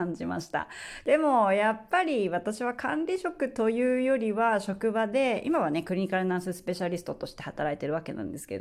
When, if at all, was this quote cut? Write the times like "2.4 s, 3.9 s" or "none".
1.0 s